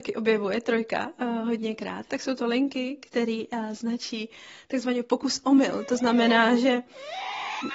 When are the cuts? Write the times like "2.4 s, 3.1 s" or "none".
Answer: 2.1 s